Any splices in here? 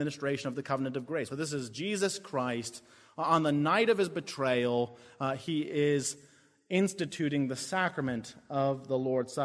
yes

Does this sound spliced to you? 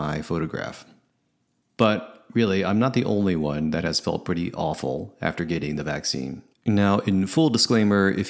yes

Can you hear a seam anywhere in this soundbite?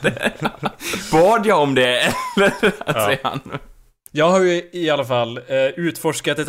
no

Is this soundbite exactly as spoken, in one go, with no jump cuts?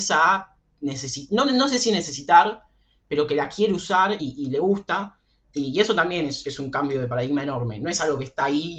yes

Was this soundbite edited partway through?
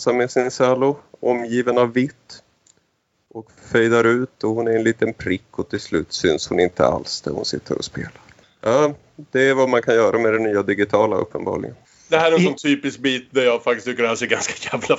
yes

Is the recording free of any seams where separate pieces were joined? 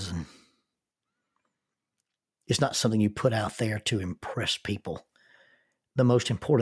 no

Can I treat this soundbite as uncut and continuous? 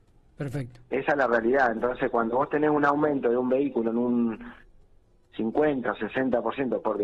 yes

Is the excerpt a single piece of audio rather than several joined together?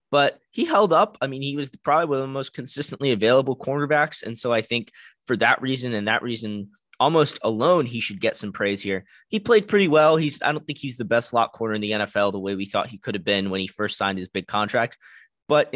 yes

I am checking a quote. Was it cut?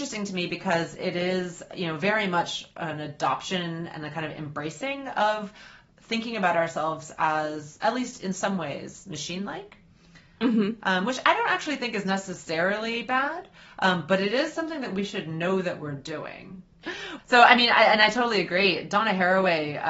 yes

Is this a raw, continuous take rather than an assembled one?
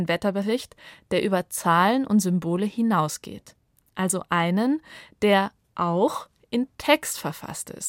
yes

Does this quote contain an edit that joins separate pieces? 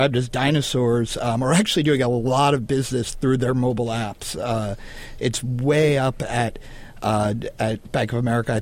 no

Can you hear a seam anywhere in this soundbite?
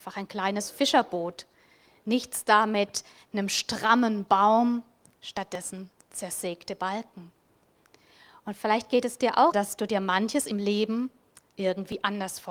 yes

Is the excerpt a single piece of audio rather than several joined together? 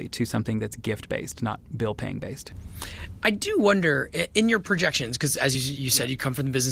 yes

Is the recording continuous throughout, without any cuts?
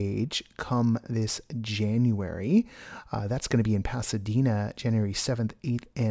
yes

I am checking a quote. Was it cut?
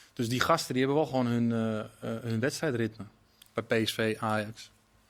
no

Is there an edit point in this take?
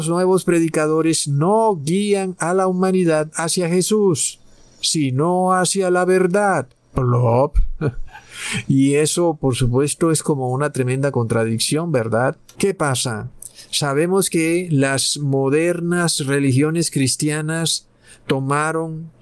no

